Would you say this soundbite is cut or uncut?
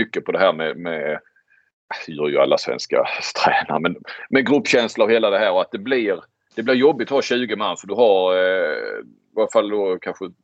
uncut